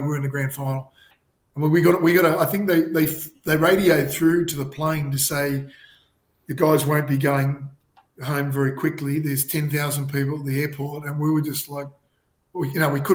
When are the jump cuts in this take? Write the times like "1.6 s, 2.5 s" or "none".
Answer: none